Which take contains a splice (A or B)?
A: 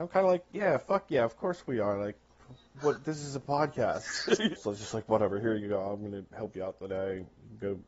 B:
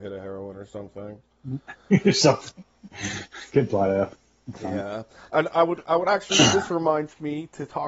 A